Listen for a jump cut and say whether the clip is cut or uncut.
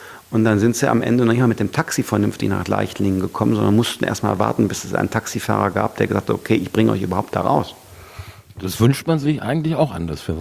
uncut